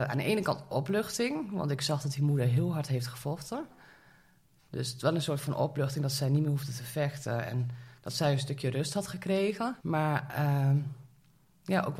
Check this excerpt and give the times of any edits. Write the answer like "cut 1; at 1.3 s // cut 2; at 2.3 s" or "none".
cut 1; at 9.8 s